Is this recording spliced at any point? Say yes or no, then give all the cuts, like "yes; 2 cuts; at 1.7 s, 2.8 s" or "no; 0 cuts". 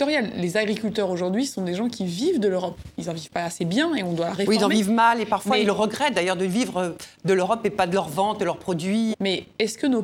yes; 1 cut; at 9.1 s